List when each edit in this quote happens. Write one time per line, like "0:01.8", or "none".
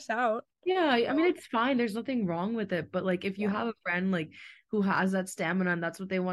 none

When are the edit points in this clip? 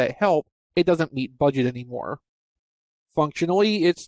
0:03.0

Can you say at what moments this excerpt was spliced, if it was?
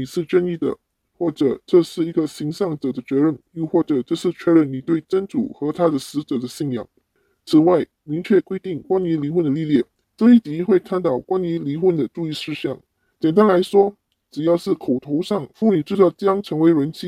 0:10.0
0:13.1

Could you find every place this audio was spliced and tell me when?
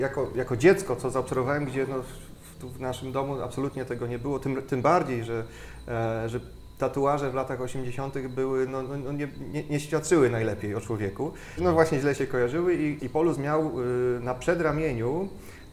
0:11.6
0:13.0

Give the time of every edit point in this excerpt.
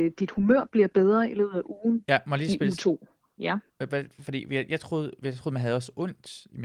0:02.1

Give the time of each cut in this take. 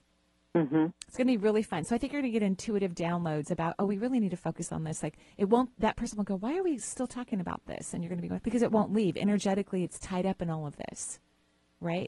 0:08.4

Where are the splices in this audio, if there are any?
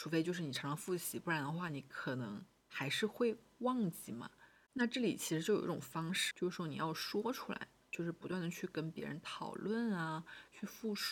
0:04.6
0:06.3

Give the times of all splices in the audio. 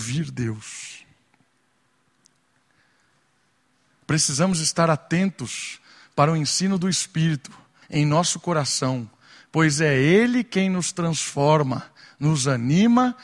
0:07.8

